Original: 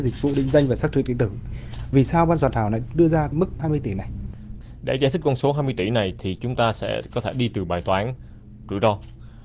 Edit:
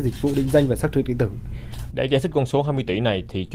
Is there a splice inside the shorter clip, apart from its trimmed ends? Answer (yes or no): yes